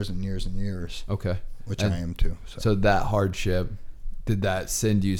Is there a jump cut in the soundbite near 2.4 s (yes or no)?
no